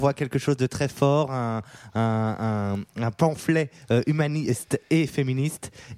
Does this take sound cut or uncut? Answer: uncut